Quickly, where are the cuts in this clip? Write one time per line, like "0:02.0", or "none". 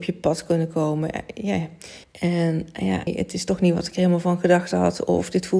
0:02.0
0:03.1